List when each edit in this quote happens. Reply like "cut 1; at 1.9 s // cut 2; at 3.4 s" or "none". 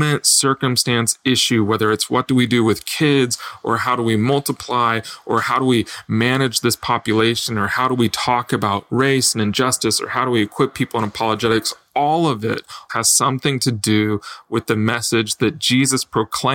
cut 1; at 12.9 s